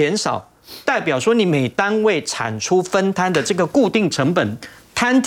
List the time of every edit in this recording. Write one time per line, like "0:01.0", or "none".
none